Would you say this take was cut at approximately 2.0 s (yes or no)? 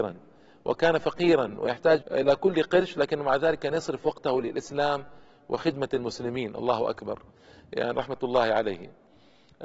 yes